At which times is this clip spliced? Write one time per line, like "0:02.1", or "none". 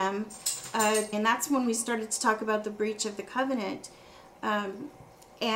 0:01.1